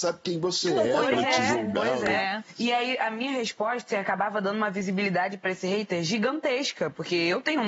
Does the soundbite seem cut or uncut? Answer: cut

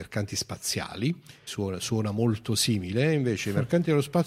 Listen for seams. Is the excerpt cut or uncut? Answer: cut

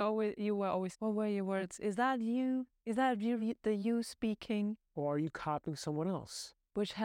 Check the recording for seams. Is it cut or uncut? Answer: cut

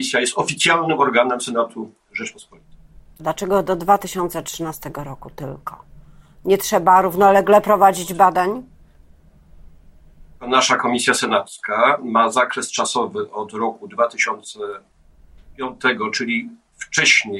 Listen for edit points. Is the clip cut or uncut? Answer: cut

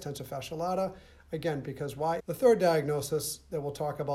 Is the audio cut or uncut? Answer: cut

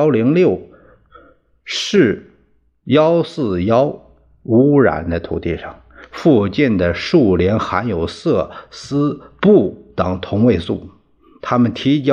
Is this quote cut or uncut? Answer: uncut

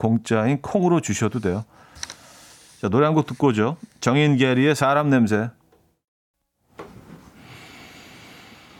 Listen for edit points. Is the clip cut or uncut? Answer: uncut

